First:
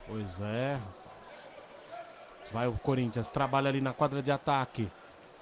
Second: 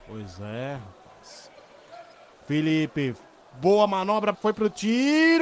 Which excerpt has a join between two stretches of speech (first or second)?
second